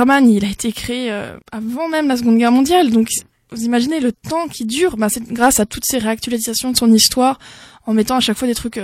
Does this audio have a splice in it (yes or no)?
yes